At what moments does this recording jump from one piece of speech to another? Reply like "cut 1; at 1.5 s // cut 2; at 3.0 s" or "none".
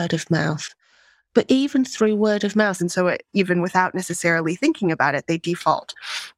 cut 1; at 2.8 s